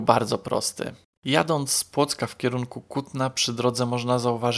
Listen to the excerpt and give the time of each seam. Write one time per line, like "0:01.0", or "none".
0:01.1